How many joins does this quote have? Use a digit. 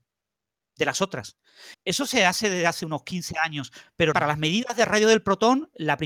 2